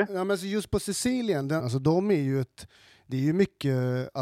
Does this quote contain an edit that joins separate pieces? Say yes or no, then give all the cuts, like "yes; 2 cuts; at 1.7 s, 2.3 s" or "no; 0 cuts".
yes; 1 cut; at 1.6 s